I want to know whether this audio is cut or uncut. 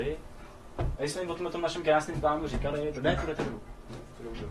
cut